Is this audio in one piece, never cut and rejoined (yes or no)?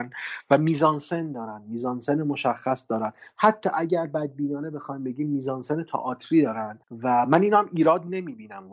no